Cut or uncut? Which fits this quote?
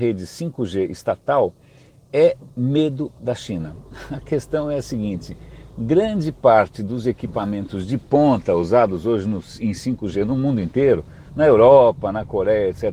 uncut